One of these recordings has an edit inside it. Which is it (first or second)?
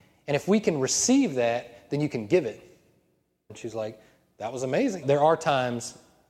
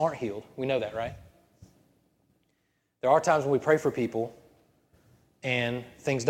first